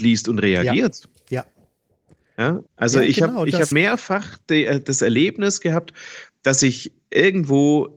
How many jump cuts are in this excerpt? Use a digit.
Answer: 2